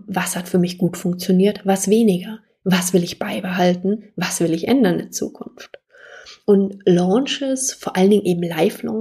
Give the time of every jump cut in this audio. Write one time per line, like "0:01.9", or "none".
none